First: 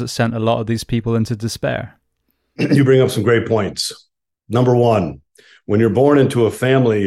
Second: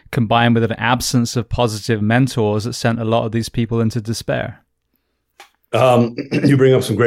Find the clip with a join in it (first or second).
first